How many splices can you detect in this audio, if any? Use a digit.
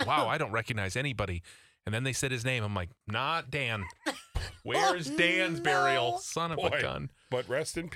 1